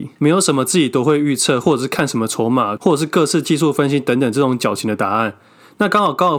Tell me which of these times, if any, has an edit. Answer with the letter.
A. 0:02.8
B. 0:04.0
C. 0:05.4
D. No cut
A